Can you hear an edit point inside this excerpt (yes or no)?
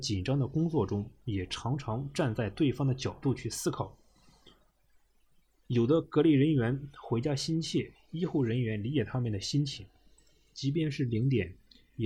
no